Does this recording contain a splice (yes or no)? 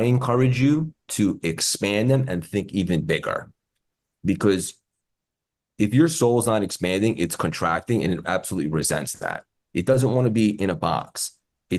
no